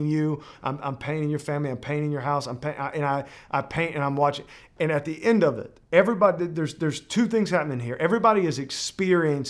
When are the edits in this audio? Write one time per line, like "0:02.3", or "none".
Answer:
none